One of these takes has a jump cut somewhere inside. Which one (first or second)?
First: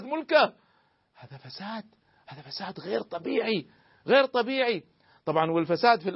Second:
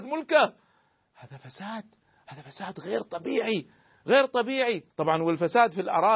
second